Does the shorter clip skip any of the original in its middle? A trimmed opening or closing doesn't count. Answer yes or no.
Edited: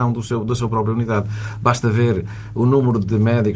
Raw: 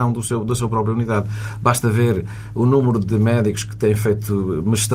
no